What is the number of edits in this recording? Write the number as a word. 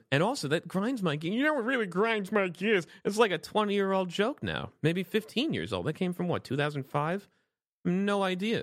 zero